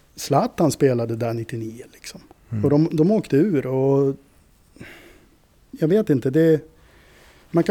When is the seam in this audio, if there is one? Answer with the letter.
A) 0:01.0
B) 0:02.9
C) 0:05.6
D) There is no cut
B